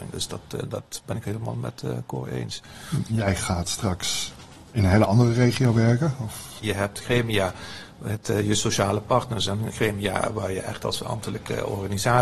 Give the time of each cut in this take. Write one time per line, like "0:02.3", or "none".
0:03.1
0:06.6